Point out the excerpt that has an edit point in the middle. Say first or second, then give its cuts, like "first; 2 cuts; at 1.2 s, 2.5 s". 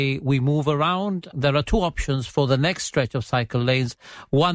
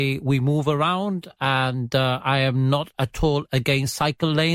first; 1 cut; at 1.3 s